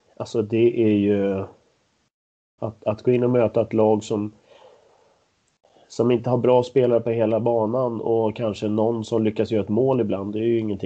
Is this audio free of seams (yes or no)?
no